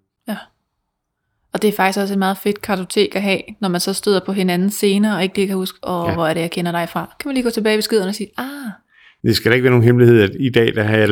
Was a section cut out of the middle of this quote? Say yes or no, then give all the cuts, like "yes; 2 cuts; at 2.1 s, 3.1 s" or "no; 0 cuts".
no; 0 cuts